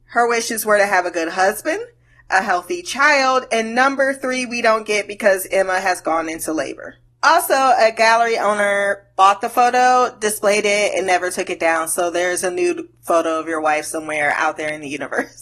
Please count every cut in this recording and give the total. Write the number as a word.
zero